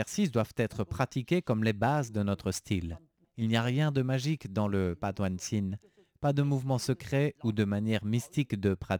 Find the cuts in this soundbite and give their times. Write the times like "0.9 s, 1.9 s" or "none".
3.2 s